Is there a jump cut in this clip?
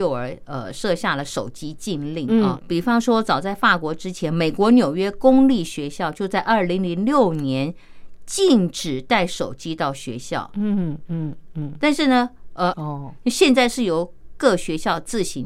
yes; 2 cuts; at 2.6 s, 12.7 s

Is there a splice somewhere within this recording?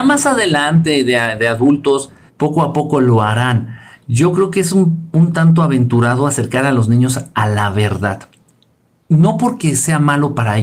yes; 1 cut; at 2.3 s

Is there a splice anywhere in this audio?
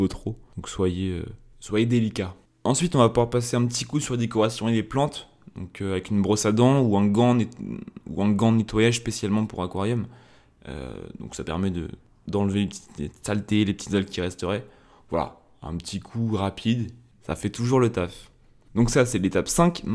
no; 0 cuts

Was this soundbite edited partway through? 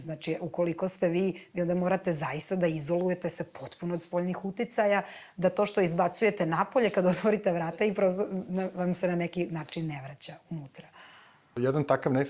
no; 0 cuts

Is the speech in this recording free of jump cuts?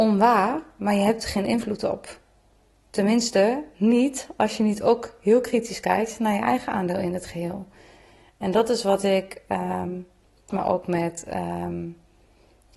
no; 1 cut; at 10.5 s

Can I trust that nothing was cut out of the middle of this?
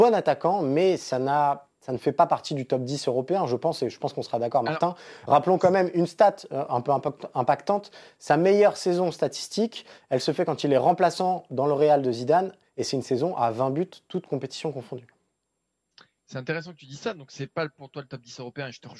yes; 0 cuts

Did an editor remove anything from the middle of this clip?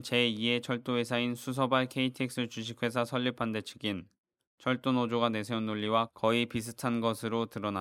no; 0 cuts

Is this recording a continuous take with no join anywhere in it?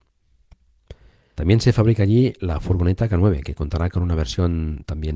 no; 1 cut; at 1.3 s

